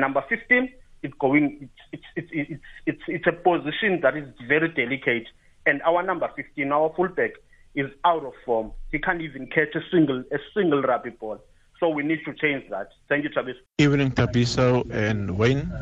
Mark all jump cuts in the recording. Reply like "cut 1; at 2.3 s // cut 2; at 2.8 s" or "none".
cut 1; at 13.7 s